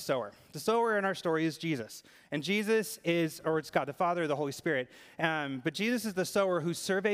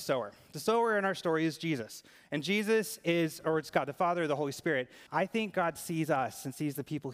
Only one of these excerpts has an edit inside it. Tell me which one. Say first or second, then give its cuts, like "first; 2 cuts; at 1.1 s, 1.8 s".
second; 1 cut; at 5.1 s